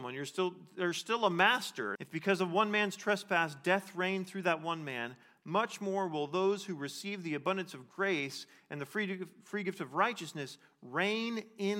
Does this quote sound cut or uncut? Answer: cut